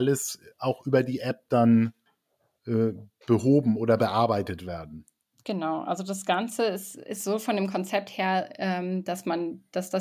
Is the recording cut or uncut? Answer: uncut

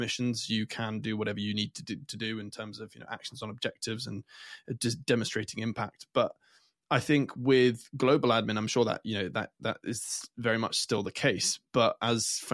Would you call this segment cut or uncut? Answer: uncut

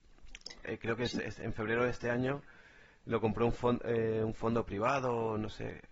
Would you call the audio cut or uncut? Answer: uncut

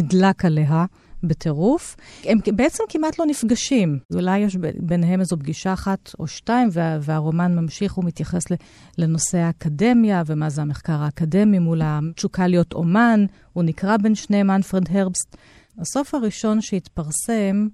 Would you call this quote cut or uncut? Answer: uncut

